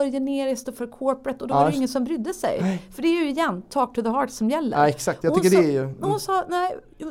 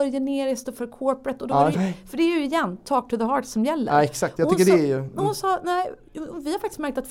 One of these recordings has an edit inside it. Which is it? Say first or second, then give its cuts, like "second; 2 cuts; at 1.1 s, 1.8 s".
second; 1 cut; at 1.7 s